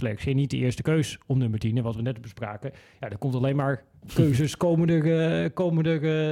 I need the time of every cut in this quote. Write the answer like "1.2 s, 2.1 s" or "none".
none